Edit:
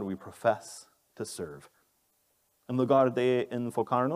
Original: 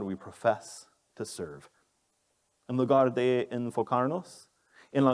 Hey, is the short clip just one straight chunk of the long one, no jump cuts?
yes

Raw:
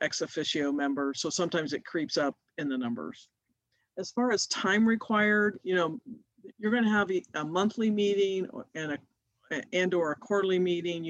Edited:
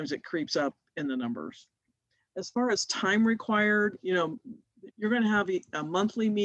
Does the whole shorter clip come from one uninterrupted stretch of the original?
yes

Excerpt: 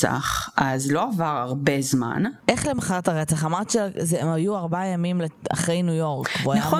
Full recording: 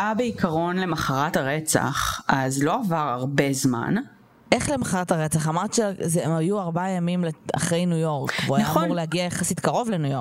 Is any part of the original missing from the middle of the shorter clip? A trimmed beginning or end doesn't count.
yes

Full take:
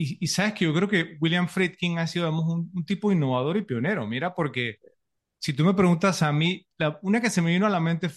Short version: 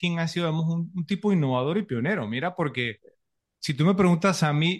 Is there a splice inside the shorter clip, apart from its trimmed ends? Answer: no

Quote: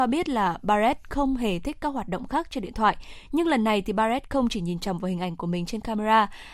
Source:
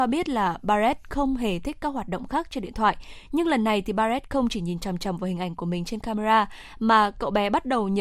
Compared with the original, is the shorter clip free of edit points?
no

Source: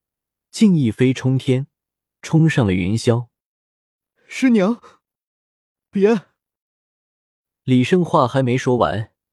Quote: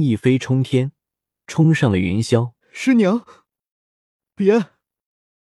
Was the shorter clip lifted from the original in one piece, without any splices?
no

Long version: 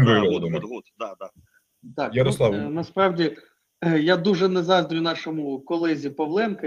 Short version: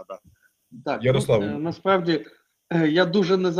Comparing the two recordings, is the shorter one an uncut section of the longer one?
yes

